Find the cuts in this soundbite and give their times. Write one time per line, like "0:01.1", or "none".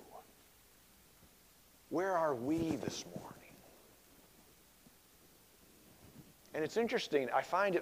none